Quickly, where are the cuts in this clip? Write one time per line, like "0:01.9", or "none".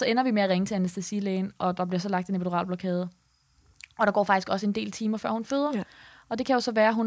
none

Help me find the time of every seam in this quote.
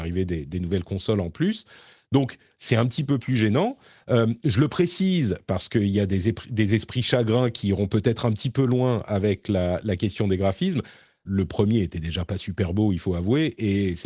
0:11.3

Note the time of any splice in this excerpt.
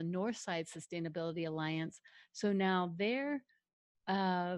none

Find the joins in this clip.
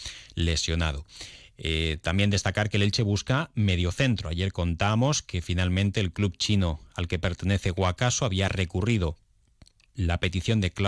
none

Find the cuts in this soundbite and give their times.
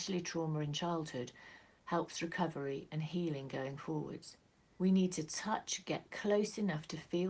0:04.8

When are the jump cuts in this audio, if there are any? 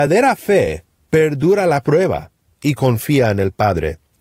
none

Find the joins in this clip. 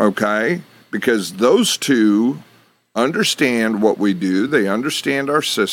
none

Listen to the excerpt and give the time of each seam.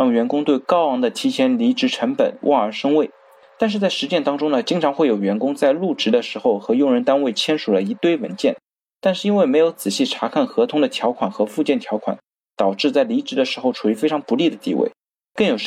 none

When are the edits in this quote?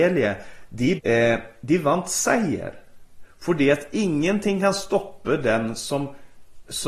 0:01.0

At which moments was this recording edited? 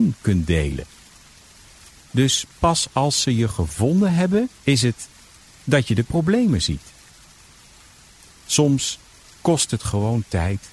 0:01.9
0:04.6

